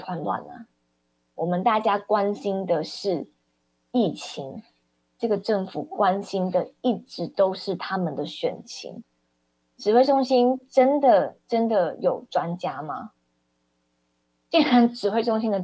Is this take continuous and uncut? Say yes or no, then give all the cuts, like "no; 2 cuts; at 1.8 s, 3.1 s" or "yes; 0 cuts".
yes; 0 cuts